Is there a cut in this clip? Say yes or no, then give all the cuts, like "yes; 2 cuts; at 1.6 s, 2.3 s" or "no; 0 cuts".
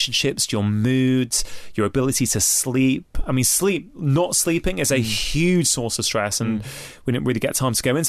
no; 0 cuts